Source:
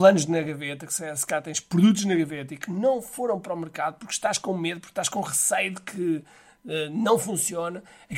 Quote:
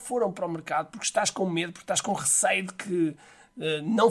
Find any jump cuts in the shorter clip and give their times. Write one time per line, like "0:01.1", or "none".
none

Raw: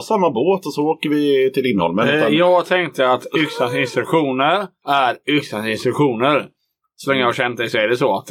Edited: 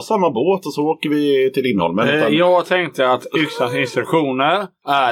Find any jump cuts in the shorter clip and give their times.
none

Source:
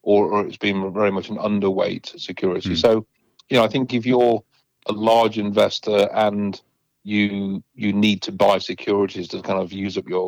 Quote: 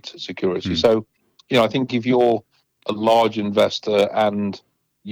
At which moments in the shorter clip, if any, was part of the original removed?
none

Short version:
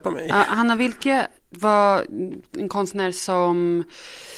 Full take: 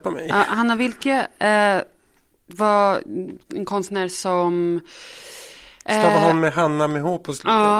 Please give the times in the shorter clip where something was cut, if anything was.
0:01.4

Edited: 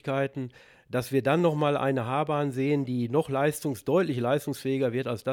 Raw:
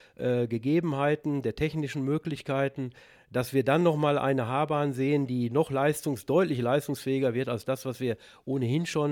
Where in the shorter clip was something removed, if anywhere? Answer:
none

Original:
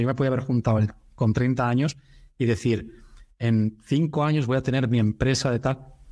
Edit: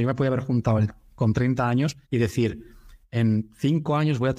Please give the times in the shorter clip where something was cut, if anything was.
0:02.0

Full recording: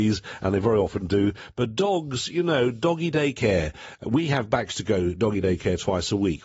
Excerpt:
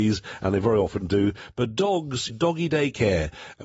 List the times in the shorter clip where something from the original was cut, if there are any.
0:02.3

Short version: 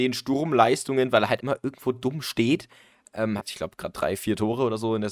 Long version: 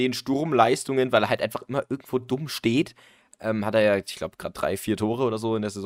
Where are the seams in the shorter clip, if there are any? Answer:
0:01.4
0:03.4

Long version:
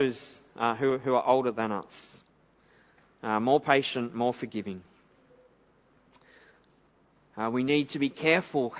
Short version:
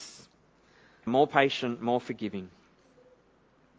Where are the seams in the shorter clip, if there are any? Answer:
0:01.1

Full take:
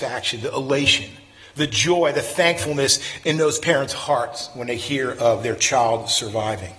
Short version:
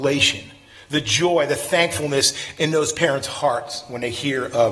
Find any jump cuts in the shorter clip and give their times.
none

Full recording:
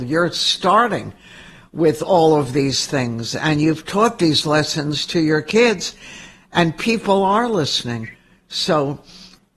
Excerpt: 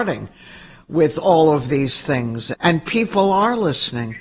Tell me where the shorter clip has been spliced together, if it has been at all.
0:02.5

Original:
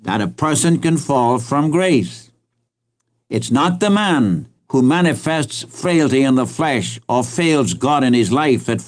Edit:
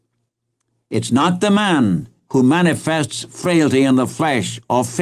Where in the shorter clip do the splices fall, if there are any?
none

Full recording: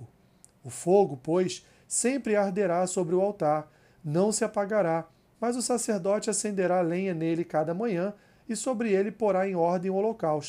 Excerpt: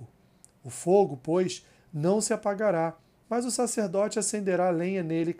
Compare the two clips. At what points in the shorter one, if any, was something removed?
0:01.8

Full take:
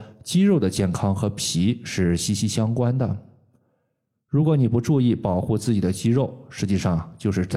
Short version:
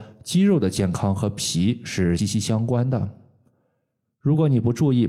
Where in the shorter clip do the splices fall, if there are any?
0:02.2

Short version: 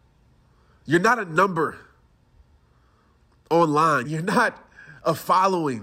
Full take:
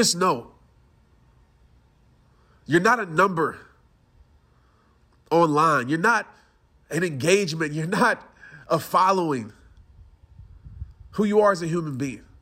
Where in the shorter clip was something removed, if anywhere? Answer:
0:04.0

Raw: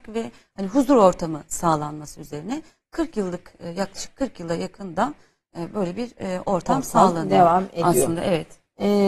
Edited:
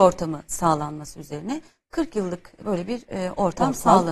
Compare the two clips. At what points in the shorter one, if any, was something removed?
0:02.6

